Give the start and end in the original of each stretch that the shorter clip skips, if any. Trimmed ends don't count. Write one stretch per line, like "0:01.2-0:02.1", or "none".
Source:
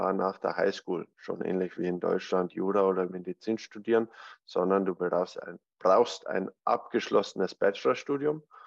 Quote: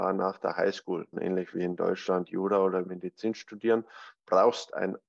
0:01.1-0:01.4
0:04.4-0:05.7